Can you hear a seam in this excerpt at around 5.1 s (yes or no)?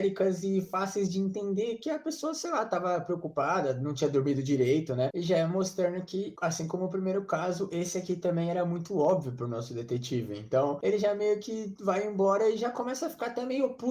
yes